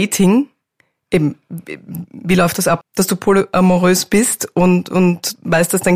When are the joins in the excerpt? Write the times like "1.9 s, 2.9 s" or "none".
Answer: 2.8 s